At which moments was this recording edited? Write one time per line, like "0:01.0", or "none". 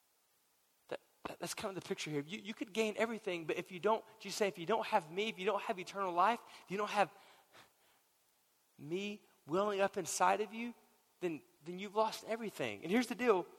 none